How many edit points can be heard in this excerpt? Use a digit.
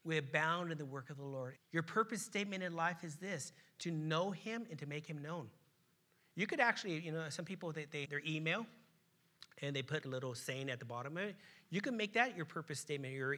3